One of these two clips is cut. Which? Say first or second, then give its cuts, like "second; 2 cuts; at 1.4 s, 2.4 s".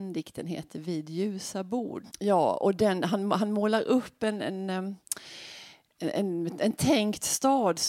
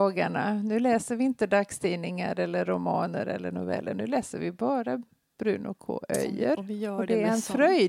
first; 1 cut; at 2.1 s